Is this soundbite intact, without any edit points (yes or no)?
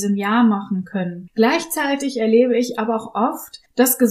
no